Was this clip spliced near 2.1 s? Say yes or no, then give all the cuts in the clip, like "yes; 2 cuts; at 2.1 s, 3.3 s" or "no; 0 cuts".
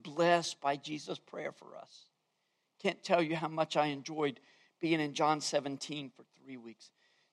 no; 0 cuts